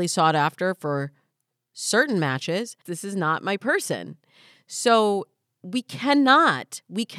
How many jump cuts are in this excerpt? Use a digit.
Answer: 1